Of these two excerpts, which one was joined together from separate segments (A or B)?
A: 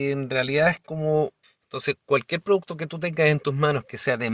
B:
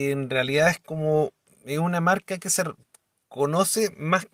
A